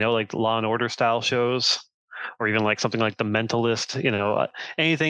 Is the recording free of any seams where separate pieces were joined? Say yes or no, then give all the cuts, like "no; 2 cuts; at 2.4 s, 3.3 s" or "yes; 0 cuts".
yes; 0 cuts